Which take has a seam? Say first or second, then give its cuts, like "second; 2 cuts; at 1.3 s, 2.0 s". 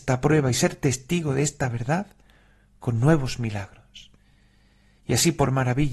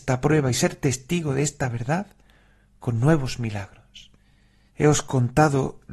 second; 1 cut; at 4.7 s